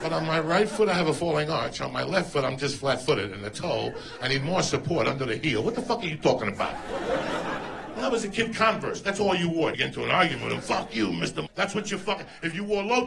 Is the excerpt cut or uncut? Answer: cut